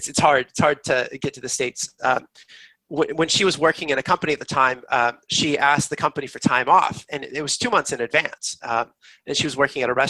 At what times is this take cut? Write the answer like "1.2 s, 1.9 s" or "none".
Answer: 2.8 s